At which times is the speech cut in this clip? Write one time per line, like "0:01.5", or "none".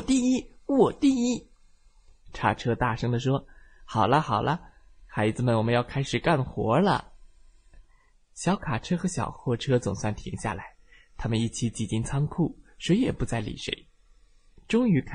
none